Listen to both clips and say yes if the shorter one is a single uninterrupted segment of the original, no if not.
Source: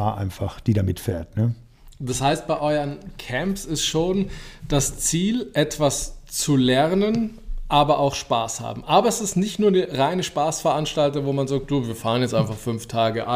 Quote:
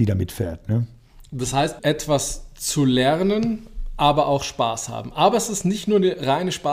no